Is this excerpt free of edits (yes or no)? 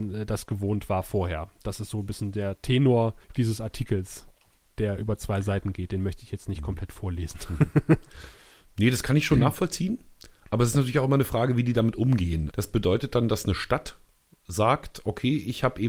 no